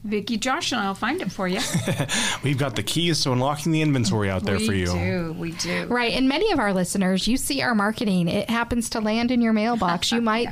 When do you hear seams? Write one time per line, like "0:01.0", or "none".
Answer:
none